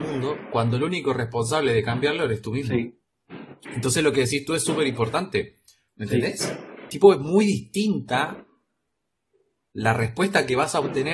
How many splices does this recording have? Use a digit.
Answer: 1